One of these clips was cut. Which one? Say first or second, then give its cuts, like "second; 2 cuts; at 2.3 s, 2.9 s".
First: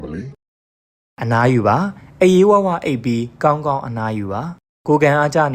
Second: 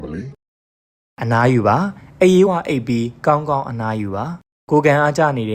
second; 1 cut; at 2.5 s